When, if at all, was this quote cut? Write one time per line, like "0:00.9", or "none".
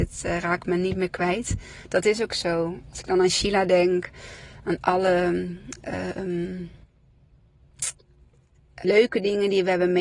0:08.8